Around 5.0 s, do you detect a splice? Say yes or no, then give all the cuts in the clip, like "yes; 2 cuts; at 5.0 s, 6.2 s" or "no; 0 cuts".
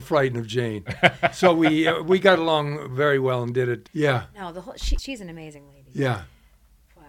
yes; 2 cuts; at 3.9 s, 5.0 s